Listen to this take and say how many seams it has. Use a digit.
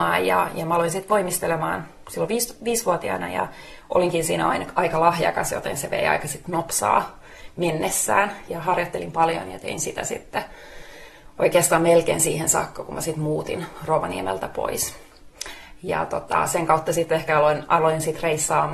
1